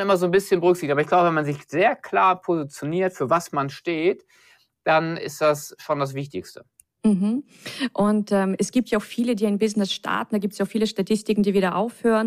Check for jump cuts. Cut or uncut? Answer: uncut